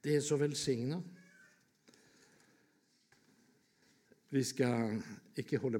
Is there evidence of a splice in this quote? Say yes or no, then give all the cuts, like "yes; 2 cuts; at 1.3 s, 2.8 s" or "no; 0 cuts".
no; 0 cuts